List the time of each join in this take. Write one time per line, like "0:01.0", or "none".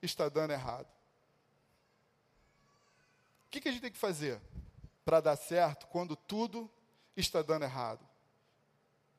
0:04.9